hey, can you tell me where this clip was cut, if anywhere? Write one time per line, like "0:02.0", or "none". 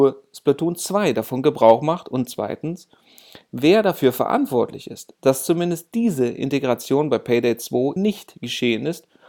0:08.0